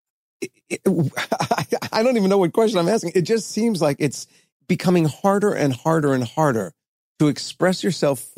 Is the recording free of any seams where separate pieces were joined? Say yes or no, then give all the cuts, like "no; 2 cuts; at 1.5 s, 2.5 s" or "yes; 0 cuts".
yes; 0 cuts